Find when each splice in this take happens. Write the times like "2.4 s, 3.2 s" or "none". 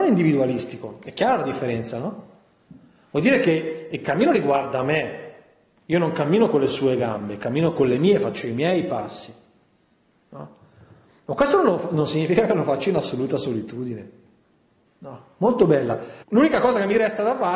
14.9 s, 16.2 s